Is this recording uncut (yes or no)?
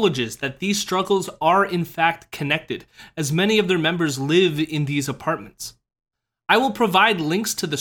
yes